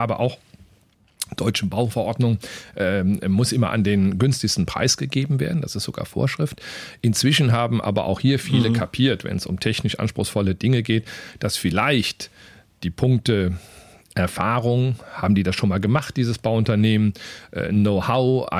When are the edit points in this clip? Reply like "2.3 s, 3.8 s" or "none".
none